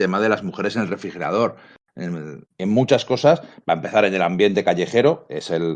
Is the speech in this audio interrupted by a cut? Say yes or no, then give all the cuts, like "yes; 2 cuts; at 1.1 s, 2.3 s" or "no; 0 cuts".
yes; 1 cut; at 2.5 s